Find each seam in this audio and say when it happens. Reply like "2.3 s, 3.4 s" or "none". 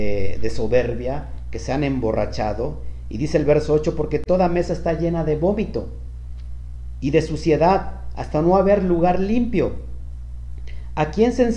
none